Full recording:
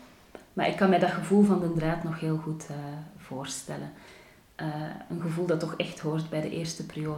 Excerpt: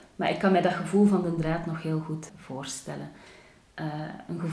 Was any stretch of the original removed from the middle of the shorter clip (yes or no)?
yes